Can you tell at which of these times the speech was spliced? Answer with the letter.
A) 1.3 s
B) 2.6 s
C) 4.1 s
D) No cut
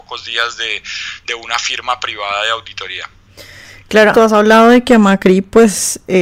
C